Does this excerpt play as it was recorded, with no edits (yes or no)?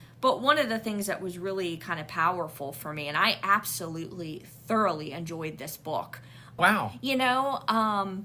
no